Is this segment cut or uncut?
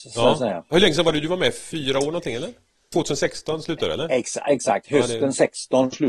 uncut